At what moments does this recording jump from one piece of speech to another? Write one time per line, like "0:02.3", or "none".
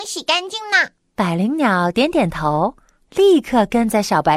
0:01.0